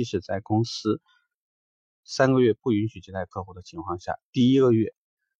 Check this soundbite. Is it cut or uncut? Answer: uncut